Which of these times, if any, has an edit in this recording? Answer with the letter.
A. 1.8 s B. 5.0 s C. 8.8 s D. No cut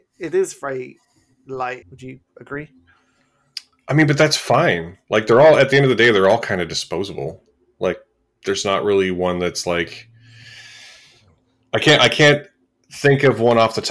A